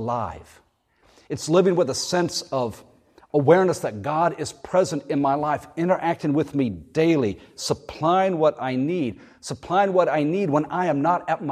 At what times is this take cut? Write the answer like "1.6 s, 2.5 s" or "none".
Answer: none